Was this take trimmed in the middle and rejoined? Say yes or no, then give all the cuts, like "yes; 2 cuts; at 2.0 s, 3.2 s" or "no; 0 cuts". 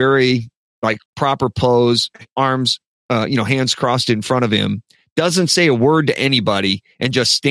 yes; 1 cut; at 1.1 s